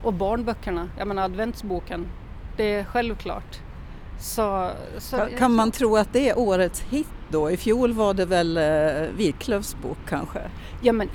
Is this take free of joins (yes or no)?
yes